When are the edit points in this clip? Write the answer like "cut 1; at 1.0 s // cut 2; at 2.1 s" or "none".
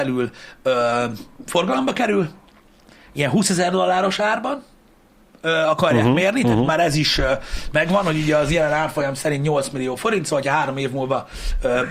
none